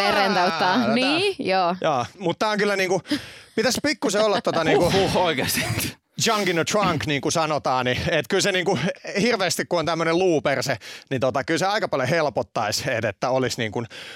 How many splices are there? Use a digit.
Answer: 0